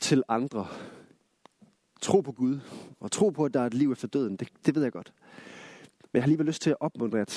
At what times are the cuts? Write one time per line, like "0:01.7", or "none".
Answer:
none

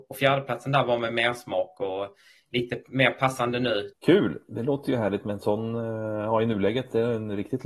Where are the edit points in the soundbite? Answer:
0:03.9

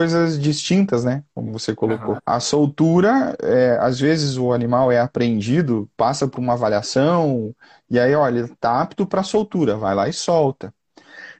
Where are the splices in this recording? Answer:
0:02.2

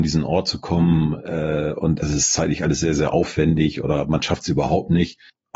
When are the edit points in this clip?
0:02.0

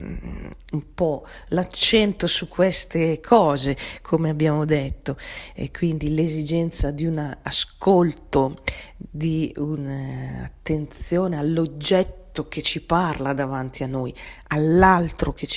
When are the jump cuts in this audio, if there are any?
none

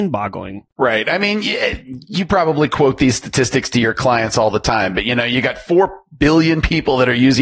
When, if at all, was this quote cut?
none

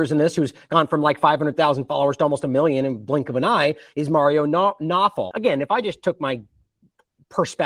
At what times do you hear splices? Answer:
0:05.3

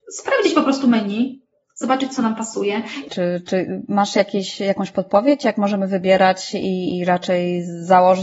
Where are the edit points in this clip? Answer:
0:03.1

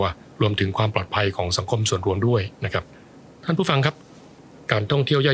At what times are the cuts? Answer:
none

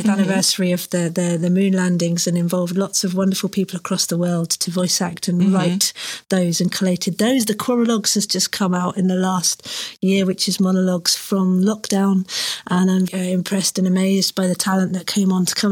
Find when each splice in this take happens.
0:13.1

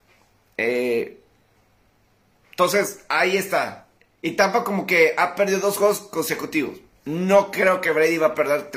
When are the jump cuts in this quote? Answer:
none

